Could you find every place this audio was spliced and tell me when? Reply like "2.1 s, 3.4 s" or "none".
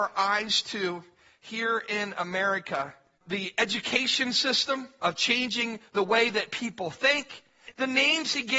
5.0 s, 7.7 s